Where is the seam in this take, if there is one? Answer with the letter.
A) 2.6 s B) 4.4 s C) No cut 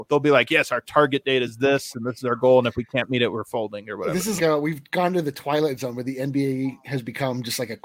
B